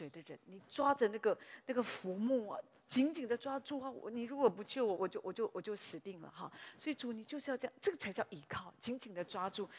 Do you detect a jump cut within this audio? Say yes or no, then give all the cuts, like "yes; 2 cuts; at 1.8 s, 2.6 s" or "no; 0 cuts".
yes; 1 cut; at 5.0 s